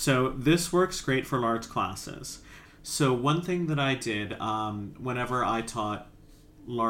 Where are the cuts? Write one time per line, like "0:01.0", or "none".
0:02.6